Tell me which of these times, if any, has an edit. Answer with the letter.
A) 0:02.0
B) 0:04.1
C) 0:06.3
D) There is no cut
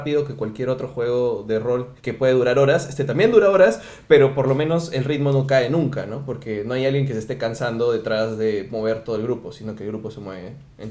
A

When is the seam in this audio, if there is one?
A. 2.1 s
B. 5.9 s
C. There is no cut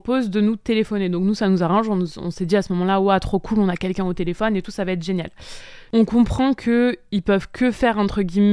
B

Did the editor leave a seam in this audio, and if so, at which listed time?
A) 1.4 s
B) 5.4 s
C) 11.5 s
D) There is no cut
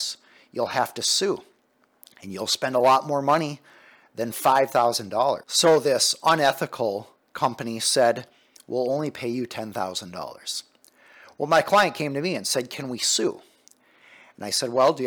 D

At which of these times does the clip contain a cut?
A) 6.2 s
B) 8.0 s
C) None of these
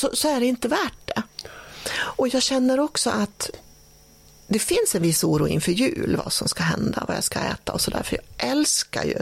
C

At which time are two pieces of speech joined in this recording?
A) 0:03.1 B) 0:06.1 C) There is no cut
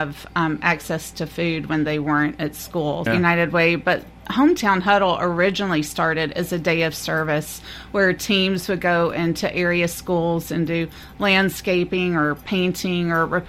A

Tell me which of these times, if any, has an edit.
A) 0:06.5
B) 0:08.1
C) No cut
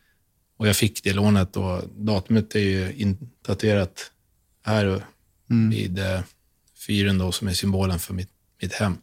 C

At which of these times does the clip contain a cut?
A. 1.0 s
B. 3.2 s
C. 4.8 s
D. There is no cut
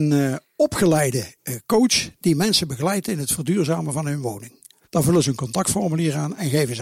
C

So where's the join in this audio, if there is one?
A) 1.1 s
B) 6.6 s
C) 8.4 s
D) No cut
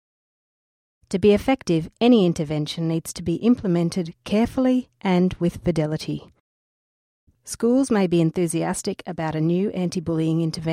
D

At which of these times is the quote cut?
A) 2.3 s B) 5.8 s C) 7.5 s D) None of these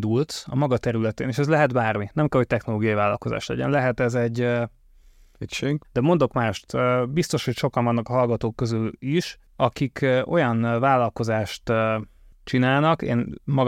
B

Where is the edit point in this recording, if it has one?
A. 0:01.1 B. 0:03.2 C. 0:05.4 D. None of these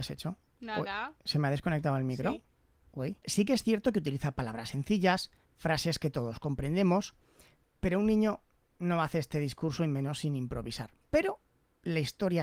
B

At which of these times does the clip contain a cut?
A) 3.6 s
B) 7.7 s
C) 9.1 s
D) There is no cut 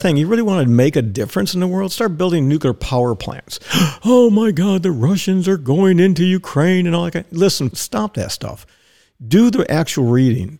B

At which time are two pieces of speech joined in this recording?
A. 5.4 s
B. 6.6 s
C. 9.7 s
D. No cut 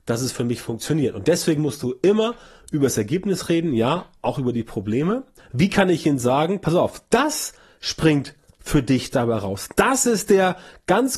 A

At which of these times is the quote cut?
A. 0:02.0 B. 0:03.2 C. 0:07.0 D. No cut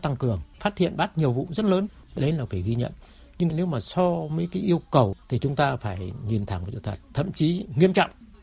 C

